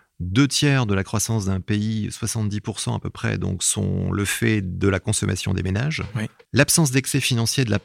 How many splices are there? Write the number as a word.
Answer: one